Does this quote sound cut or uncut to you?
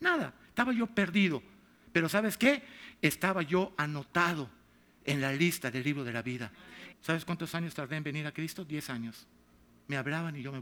cut